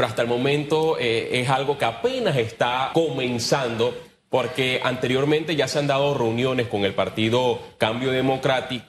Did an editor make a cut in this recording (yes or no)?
yes